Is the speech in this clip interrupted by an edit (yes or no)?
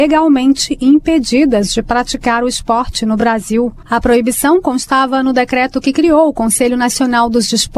no